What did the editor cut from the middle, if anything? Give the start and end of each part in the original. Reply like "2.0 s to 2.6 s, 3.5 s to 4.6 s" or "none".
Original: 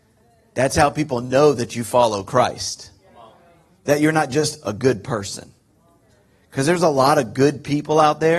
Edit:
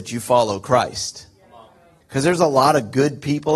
3.6 s to 6.4 s